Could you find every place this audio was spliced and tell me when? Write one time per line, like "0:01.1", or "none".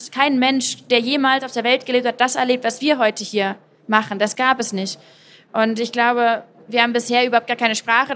none